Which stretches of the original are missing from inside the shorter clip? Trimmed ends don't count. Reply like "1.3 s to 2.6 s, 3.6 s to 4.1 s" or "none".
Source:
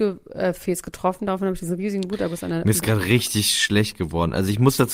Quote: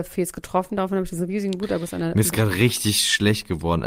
none